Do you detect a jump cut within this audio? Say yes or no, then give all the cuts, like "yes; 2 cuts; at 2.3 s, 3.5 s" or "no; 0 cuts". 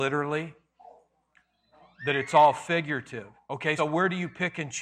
yes; 1 cut; at 3.8 s